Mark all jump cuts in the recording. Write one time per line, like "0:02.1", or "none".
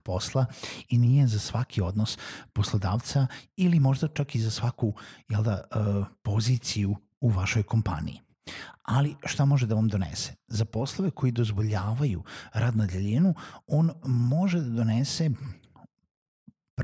none